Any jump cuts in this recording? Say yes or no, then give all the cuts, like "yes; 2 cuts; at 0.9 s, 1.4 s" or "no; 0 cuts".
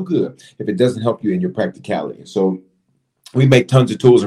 no; 0 cuts